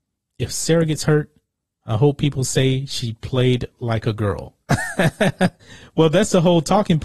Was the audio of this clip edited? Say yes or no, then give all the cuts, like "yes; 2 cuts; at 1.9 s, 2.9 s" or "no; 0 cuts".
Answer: no; 0 cuts